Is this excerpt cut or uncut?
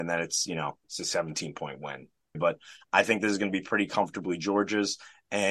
cut